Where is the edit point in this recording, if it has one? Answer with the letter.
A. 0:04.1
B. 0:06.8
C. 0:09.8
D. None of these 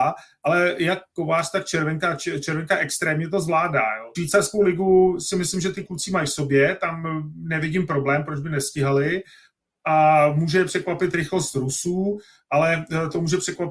A